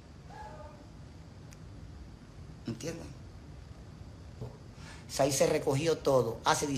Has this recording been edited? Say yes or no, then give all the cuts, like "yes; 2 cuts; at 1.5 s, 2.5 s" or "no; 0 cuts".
yes; 1 cut; at 4.4 s